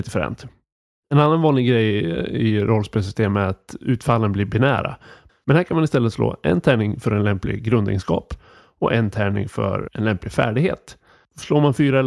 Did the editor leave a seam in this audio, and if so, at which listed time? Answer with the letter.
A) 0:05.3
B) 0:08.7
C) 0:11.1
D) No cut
A